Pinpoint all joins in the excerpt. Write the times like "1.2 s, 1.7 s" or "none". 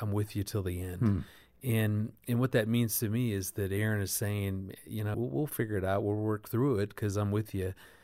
5.1 s